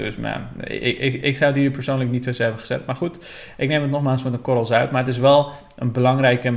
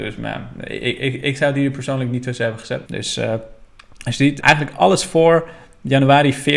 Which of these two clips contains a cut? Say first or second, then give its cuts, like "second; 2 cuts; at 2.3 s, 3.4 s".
second; 2 cuts; at 2.9 s, 4.4 s